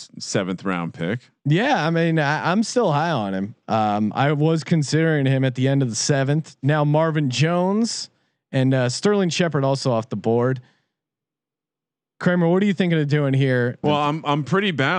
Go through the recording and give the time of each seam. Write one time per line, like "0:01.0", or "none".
0:13.8